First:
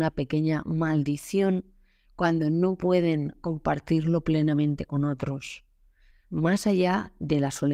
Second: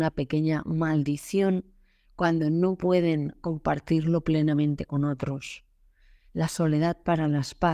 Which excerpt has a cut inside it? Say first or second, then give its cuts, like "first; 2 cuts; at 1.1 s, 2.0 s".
first; 1 cut; at 6.1 s